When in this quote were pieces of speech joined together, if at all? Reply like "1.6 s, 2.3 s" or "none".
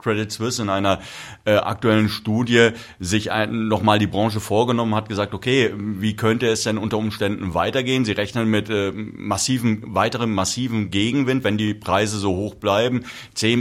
none